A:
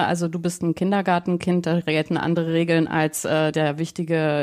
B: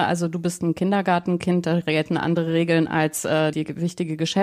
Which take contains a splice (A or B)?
B